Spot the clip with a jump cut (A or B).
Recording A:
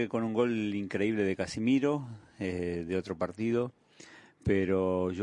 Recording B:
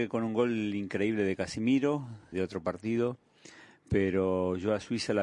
B